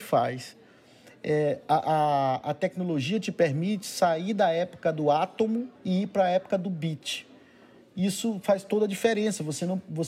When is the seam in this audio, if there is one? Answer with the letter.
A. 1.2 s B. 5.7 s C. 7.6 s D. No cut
B